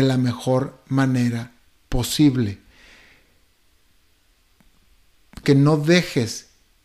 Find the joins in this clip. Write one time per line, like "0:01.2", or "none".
0:05.4